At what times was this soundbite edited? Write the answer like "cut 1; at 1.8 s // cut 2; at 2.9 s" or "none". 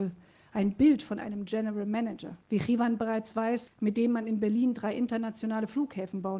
cut 1; at 2.4 s // cut 2; at 3.7 s